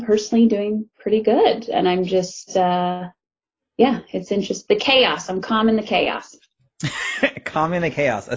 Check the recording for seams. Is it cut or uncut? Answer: uncut